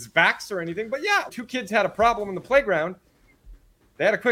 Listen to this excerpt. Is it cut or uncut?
cut